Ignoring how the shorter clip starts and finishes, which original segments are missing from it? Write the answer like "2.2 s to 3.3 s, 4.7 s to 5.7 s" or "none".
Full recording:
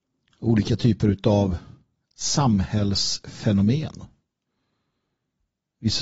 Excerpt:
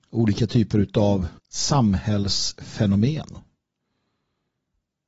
1.7 s to 2.0 s